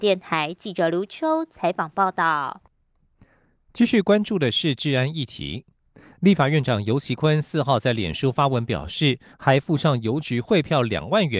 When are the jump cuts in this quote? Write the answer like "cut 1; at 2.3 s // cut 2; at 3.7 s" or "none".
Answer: cut 1; at 9.3 s